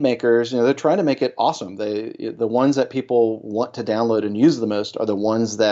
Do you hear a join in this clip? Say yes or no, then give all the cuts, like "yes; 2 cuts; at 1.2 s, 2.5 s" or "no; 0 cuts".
no; 0 cuts